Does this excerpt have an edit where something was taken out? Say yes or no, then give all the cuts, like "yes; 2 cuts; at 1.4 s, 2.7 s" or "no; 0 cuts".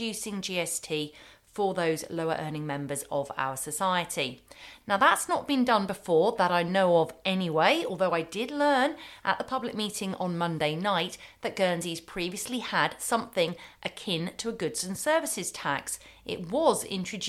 yes; 1 cut; at 4.8 s